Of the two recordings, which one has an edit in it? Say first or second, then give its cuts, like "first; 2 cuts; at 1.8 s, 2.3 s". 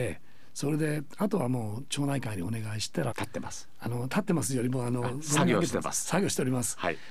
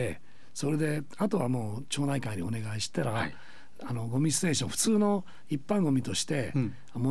first; 1 cut; at 3.1 s